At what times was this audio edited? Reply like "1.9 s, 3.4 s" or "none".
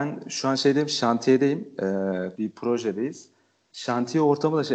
2.3 s